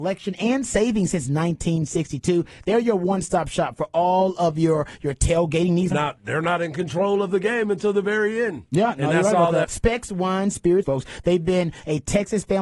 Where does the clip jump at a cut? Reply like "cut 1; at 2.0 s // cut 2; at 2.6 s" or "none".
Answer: cut 1; at 5.9 s // cut 2; at 9.6 s // cut 3; at 10.8 s